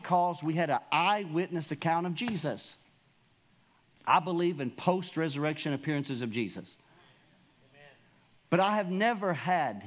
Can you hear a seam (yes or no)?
yes